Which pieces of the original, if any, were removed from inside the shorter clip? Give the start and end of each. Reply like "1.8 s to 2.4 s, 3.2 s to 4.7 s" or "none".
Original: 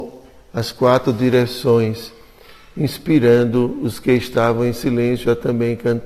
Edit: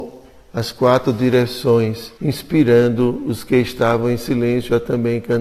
2.2 s to 2.7 s